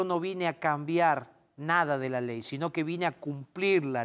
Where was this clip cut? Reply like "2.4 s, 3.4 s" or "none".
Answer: none